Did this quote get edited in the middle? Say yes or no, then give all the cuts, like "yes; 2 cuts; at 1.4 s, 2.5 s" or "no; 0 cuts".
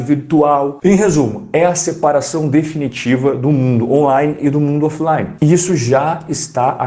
no; 0 cuts